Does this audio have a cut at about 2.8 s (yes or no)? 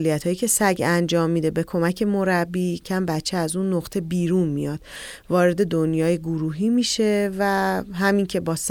yes